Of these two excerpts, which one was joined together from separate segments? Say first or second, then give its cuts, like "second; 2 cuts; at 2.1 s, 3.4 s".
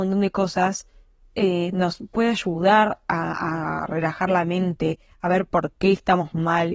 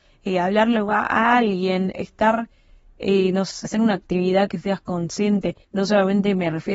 second; 3 cuts; at 1.9 s, 3.6 s, 5.6 s